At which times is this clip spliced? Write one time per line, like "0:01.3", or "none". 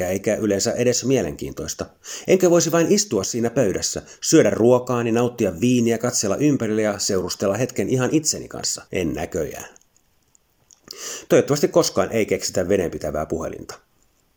0:08.9
0:11.3